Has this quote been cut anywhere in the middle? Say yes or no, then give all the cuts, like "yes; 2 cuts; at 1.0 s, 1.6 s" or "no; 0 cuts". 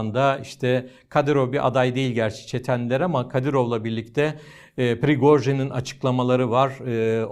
no; 0 cuts